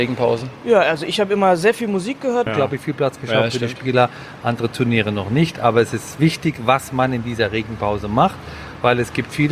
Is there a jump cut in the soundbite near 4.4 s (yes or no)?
no